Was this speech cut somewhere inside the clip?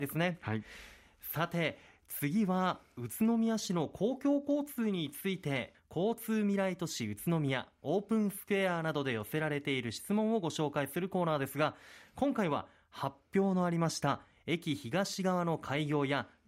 yes; 1 cut; at 5.7 s

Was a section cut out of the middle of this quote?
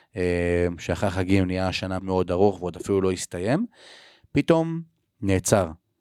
yes; 1 cut; at 2.0 s

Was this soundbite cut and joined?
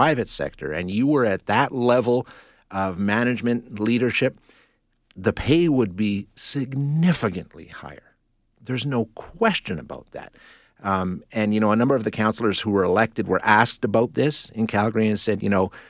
no; 0 cuts

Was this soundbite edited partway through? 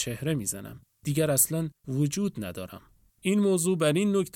yes; 1 cut; at 3.1 s

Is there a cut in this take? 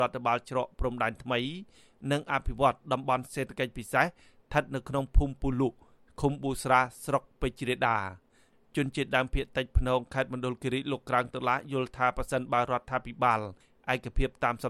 no; 0 cuts

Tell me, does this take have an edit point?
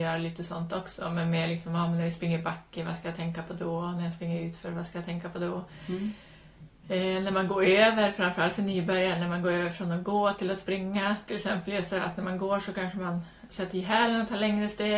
no; 0 cuts

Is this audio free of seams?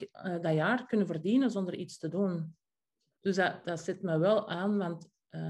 no; 1 cut; at 3.2 s

